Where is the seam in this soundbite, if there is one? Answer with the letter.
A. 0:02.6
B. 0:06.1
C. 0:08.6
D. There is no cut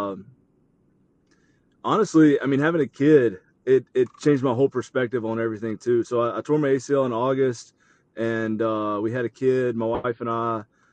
D